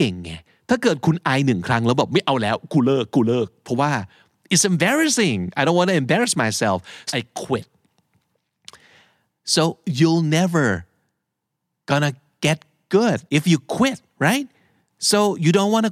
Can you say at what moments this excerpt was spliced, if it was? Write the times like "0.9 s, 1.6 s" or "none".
7.1 s, 13.3 s